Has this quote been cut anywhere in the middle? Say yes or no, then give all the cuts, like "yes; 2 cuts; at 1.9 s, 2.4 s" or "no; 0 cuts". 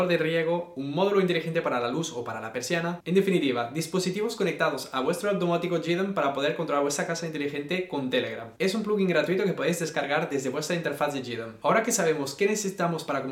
yes; 1 cut; at 8.6 s